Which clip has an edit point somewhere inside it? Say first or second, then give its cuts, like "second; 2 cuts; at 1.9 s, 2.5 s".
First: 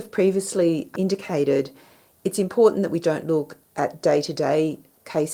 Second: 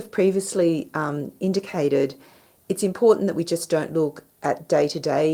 first; 2 cuts; at 1.0 s, 3.0 s